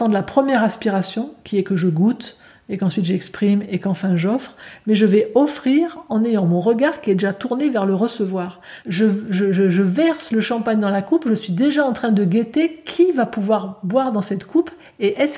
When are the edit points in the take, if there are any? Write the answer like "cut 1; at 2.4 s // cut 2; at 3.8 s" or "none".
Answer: cut 1; at 8.8 s